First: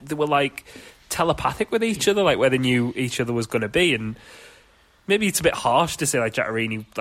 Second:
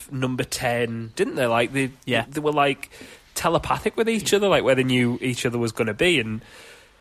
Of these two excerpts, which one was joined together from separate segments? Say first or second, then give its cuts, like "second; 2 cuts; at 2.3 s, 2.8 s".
second; 1 cut; at 1.1 s